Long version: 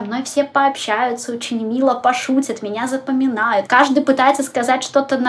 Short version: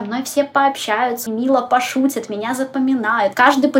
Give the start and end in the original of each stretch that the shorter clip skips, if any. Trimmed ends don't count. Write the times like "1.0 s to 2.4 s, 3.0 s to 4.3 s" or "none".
1.3 s to 1.6 s